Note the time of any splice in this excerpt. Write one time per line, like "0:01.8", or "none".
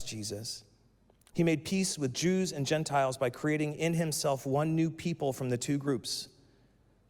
0:01.3

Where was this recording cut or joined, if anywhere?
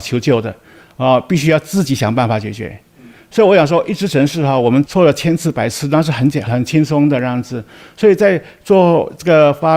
0:06.5

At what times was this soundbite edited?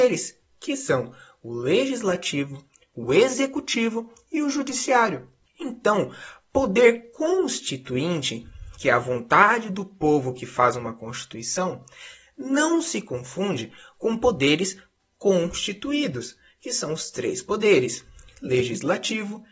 none

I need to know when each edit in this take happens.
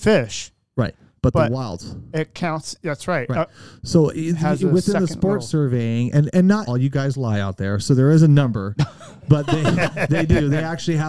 0:06.7

